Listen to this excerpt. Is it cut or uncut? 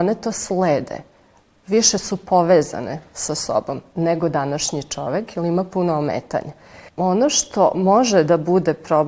uncut